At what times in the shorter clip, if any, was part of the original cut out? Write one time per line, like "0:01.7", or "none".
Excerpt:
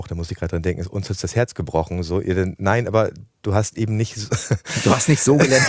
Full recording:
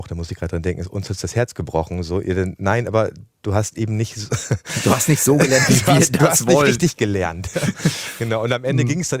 none